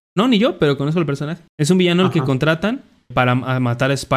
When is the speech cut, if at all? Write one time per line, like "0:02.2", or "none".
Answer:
0:01.5
0:03.1